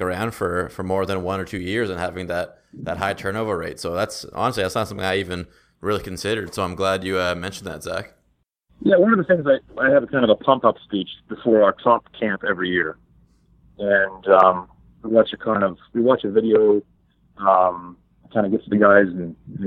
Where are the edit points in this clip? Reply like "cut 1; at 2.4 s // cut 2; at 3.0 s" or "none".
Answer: cut 1; at 18.7 s